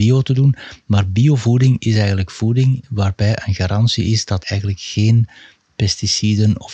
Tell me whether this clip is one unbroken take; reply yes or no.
no